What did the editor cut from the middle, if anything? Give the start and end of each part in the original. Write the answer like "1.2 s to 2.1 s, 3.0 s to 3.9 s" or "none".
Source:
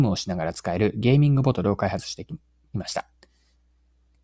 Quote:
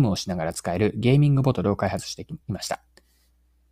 2.4 s to 2.7 s